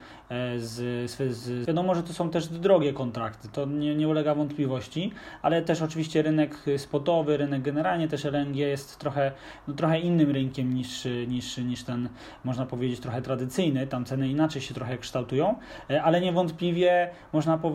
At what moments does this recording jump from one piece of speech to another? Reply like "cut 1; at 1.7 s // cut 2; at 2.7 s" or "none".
cut 1; at 1.7 s